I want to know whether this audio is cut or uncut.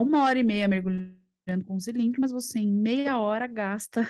uncut